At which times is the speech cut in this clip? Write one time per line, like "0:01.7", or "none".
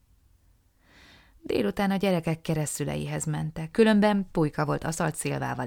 0:03.7